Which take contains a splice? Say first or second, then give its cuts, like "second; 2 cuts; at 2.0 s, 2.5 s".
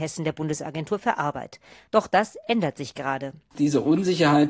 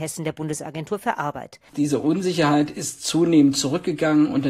second; 1 cut; at 1.7 s